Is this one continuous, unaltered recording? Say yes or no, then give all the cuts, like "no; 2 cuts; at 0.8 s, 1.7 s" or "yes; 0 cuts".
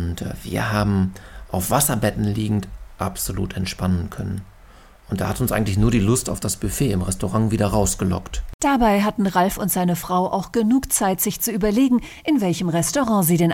yes; 0 cuts